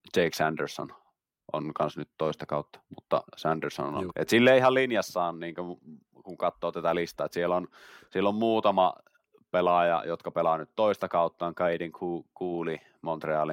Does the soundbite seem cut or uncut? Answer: cut